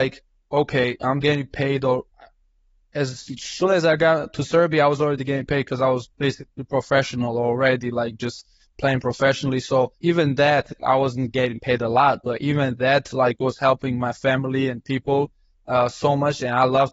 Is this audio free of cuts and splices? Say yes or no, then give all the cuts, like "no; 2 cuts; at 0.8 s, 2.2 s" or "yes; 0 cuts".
no; 1 cut; at 9.9 s